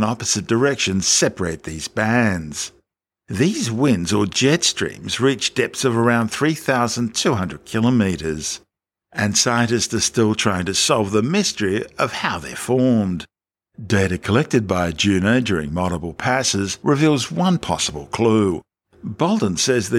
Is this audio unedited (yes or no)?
no